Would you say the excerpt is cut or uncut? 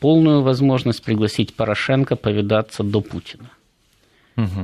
uncut